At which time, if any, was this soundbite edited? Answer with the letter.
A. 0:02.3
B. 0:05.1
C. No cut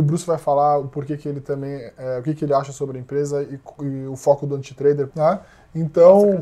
B